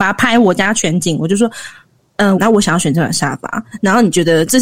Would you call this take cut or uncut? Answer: cut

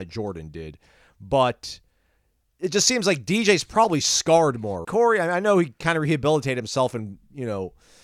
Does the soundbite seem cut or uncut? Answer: cut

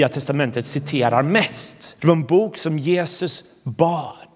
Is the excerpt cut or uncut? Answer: cut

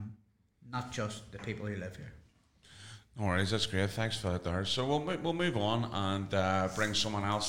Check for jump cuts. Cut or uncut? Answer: uncut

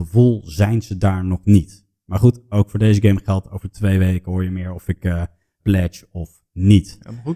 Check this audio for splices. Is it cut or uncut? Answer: cut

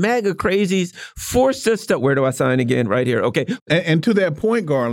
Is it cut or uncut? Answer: cut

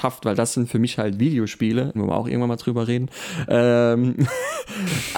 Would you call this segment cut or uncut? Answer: cut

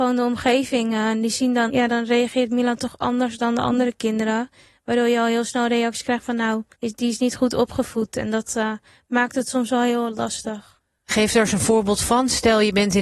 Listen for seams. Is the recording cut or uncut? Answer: cut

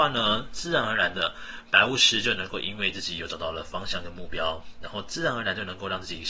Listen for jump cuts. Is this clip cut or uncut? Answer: uncut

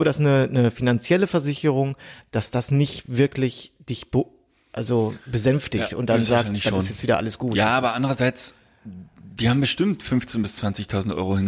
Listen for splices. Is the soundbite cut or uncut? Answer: uncut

